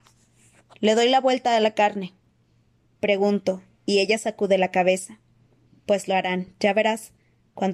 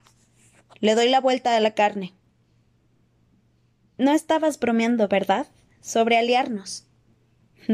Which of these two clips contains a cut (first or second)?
first